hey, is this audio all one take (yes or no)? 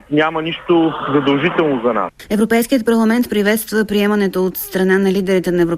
yes